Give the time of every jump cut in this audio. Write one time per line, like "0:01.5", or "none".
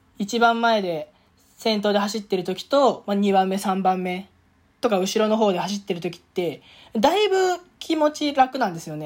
none